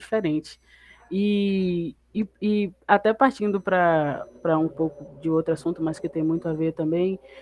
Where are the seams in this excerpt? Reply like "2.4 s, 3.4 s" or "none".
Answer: none